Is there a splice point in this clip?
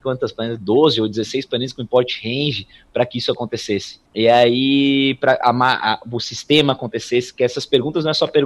yes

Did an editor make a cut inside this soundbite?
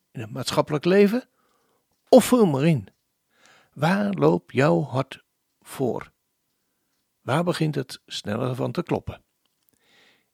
no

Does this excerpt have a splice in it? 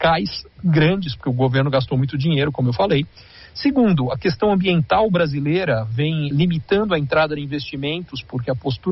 yes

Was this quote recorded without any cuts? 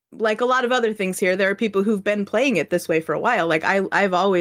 yes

